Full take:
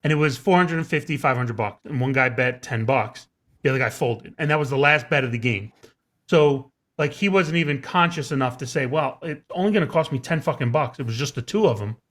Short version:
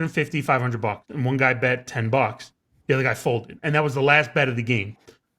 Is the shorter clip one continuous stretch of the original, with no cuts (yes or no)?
yes